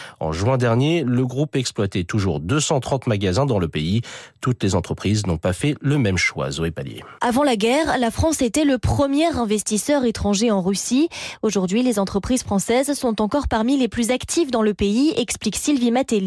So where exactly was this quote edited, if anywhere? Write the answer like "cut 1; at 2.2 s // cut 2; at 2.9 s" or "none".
cut 1; at 7.2 s